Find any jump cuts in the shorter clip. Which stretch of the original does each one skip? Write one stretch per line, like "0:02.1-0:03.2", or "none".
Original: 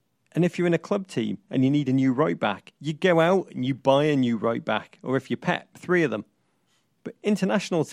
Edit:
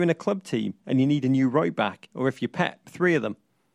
0:02.8-0:05.0